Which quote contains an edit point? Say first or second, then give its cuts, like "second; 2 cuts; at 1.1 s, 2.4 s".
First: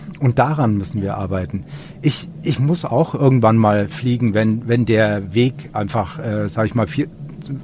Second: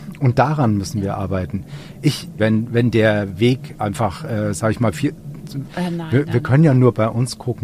second; 2 cuts; at 2.4 s, 5.7 s